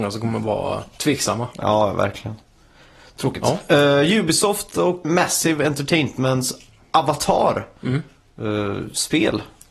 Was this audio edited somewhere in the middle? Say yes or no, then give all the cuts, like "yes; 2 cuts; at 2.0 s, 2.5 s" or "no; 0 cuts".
yes; 1 cut; at 5.0 s